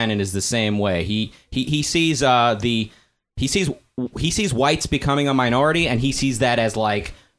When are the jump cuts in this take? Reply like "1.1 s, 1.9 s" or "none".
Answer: none